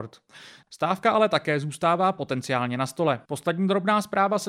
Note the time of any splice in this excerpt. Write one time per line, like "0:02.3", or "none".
0:03.2